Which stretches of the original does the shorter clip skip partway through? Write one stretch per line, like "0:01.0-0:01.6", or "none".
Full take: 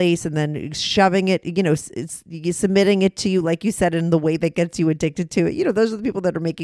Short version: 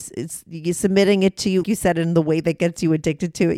0:03.4-0:03.6